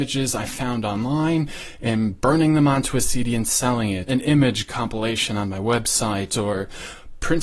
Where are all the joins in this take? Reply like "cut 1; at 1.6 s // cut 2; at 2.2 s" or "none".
cut 1; at 4.1 s